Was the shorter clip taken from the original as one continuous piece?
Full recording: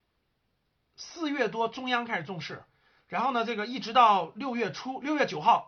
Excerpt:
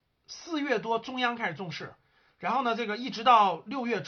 yes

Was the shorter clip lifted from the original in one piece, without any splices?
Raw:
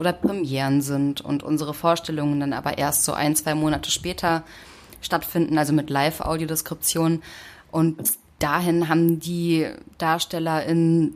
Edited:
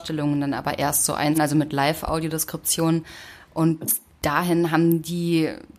no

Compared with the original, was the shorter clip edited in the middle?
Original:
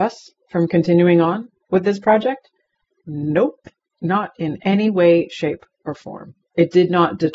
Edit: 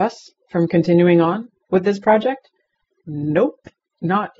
no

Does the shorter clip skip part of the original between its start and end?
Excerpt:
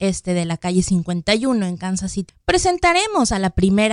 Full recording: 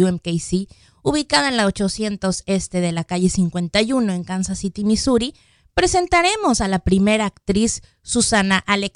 yes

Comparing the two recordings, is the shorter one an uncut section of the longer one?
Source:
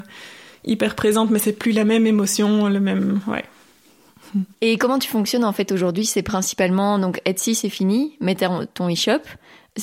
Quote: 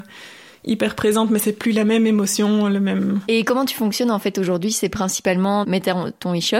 no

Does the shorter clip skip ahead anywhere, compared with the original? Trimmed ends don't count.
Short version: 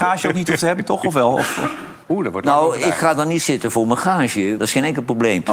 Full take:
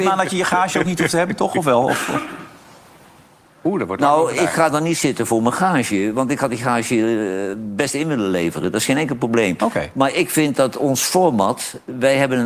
yes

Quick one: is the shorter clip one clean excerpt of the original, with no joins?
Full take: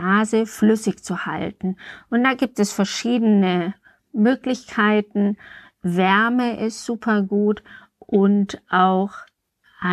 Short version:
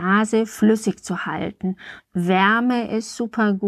no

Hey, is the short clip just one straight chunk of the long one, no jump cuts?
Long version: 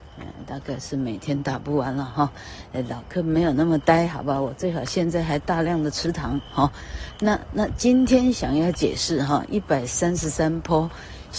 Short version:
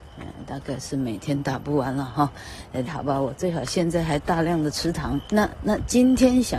no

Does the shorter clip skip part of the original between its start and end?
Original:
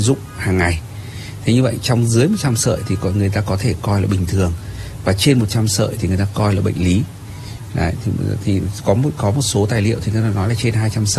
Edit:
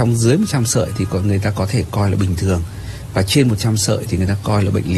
no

